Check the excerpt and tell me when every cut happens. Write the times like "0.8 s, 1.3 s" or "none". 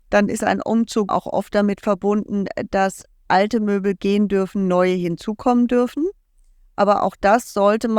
1.1 s